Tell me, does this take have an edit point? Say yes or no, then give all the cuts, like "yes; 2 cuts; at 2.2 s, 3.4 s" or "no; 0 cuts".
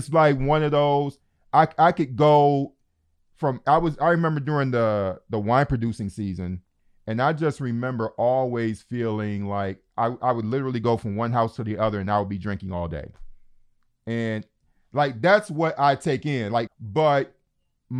yes; 1 cut; at 16.7 s